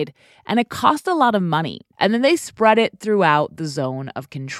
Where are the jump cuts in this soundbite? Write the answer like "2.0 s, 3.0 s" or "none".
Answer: 1.9 s